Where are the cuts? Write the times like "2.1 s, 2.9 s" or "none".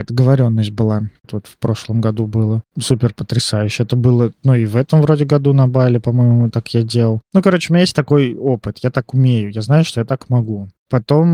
1.2 s

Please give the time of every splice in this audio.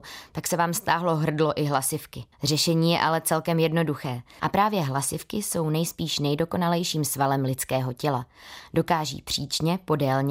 2.3 s, 4.4 s

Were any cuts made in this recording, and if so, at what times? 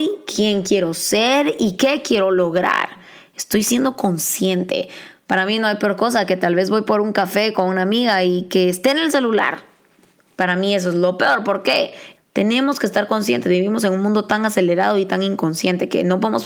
1.8 s, 12.2 s

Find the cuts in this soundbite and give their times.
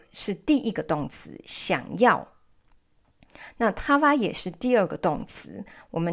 none

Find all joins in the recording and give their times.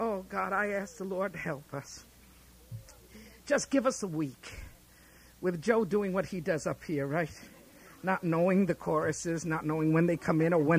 1.3 s

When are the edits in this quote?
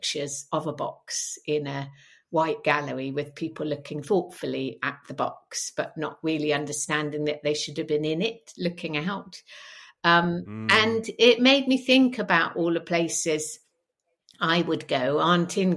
none

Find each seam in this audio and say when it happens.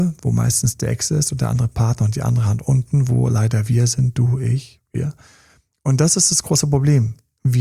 none

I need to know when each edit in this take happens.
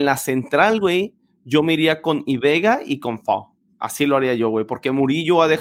none

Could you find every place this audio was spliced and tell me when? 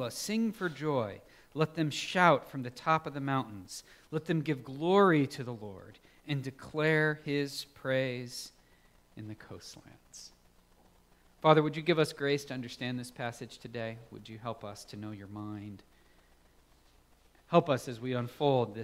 none

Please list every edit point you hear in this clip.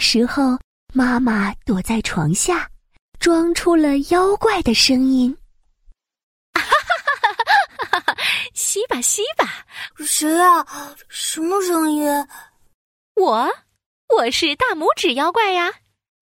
9.9 s

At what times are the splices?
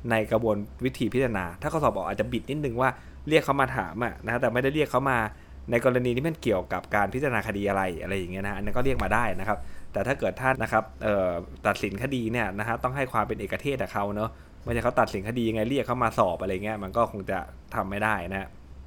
10.5 s

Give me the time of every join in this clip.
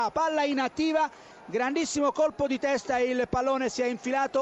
1.3 s

